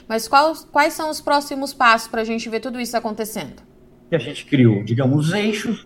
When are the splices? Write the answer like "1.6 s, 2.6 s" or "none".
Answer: 3.9 s